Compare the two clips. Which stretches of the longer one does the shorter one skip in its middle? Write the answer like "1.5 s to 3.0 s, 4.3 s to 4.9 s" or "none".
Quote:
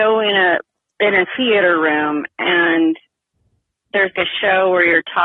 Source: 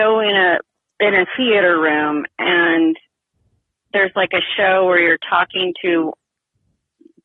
4.1 s to 4.3 s